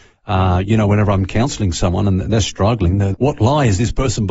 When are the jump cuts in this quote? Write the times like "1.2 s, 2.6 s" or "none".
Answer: 3.1 s